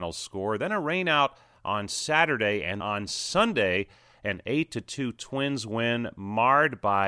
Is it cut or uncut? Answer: cut